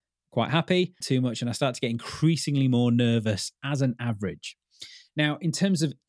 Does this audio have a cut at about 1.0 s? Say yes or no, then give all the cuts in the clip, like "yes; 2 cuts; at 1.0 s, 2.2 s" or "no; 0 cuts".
yes; 1 cut; at 1.0 s